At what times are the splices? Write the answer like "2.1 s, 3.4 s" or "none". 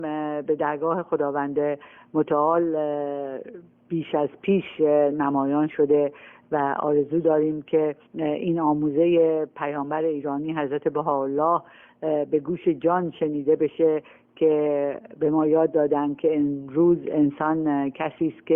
8.1 s